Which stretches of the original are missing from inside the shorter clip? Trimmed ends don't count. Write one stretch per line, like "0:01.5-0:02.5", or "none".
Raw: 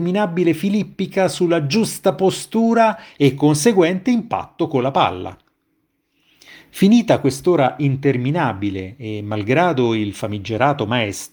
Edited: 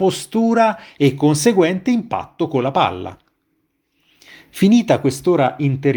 none